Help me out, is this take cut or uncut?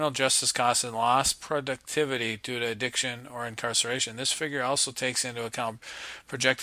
uncut